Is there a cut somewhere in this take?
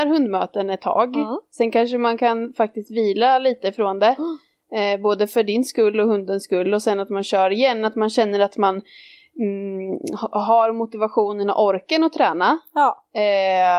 no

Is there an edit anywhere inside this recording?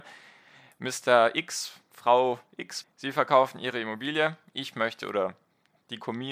yes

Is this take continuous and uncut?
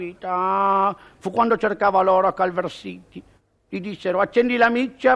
yes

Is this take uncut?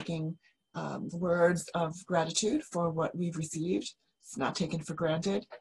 no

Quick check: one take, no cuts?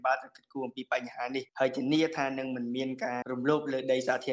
no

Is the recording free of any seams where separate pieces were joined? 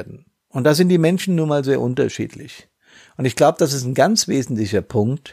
yes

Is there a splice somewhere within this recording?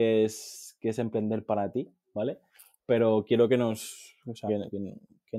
yes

